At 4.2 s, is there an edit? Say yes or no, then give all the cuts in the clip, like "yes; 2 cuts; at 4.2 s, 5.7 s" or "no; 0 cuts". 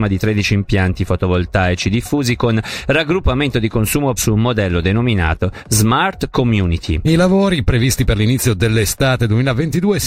yes; 1 cut; at 4.2 s